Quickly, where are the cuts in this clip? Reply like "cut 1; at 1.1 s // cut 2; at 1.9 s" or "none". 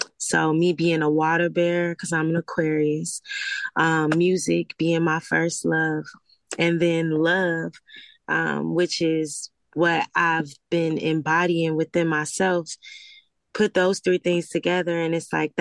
none